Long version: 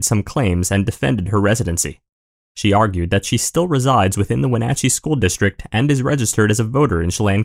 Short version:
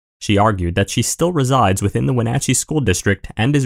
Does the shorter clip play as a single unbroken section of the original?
yes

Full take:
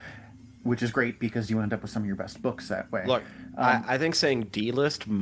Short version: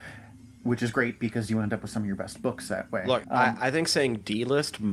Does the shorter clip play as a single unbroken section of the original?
no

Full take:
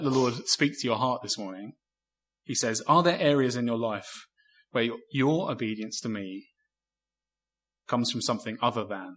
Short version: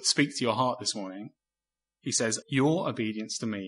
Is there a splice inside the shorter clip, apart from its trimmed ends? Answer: yes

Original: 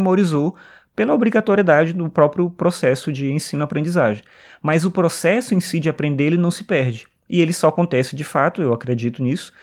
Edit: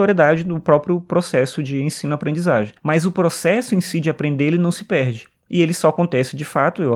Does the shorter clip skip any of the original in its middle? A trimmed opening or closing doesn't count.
yes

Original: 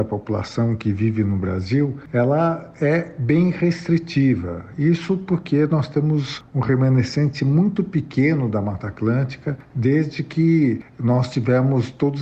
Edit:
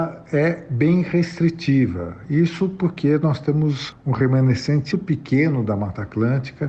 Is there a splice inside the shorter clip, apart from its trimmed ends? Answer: yes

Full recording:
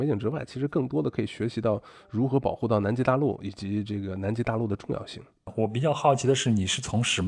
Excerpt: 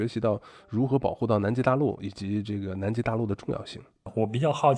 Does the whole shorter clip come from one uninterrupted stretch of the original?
yes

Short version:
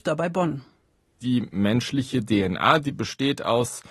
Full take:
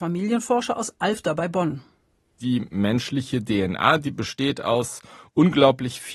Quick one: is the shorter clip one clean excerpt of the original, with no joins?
yes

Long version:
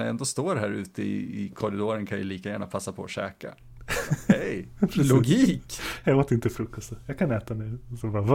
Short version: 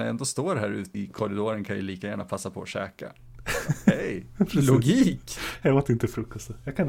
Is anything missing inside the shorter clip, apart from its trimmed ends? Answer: yes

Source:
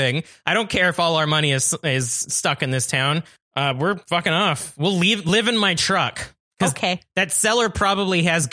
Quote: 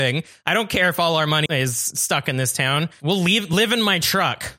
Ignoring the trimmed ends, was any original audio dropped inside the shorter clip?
yes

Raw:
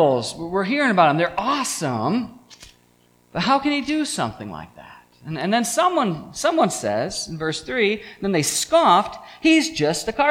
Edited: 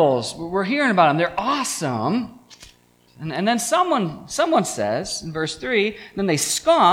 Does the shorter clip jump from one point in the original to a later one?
yes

